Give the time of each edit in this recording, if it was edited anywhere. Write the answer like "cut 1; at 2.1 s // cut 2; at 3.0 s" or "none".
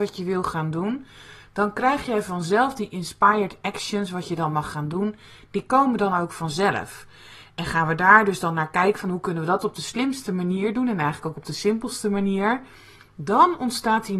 none